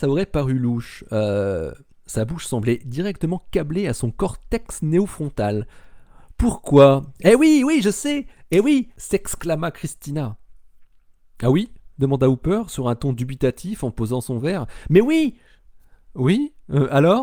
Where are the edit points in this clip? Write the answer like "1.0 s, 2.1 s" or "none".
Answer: none